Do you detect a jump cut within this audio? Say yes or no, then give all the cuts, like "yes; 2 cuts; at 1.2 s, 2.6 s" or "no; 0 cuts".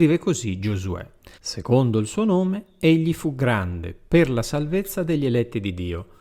yes; 1 cut; at 1.3 s